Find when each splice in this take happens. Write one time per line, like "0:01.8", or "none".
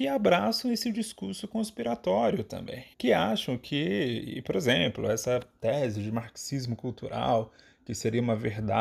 0:02.9